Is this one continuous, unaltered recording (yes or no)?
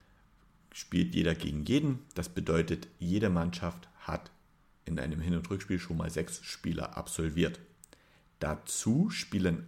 yes